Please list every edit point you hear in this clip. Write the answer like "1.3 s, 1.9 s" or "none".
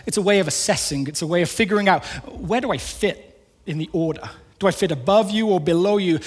none